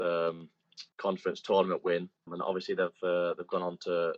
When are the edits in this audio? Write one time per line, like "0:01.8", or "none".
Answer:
0:00.9
0:02.3